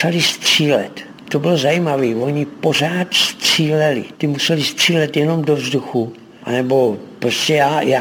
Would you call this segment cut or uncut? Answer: uncut